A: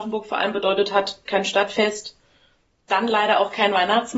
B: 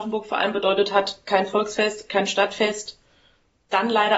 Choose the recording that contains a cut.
A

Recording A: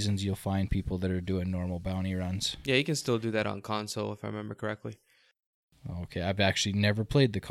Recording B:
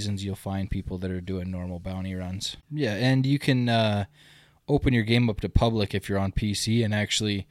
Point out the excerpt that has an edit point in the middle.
B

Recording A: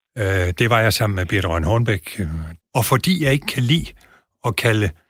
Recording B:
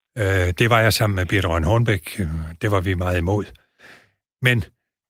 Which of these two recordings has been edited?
A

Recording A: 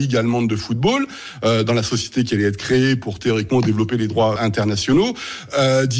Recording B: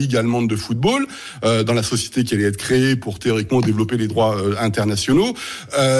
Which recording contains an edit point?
A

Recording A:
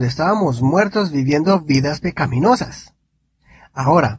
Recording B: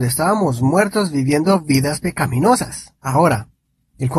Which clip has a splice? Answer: B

